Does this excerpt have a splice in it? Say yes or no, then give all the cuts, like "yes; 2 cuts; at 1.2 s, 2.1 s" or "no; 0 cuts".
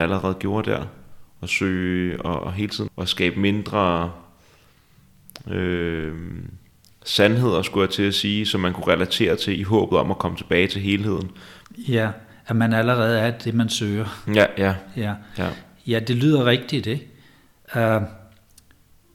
yes; 2 cuts; at 2.9 s, 11.6 s